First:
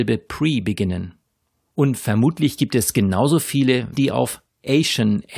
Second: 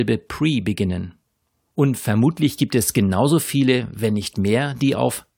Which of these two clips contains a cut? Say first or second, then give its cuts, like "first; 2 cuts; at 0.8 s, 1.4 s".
first; 1 cut; at 3.9 s